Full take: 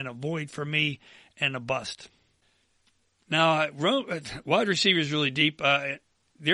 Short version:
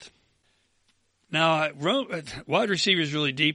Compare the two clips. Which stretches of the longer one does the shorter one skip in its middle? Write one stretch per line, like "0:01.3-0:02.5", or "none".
none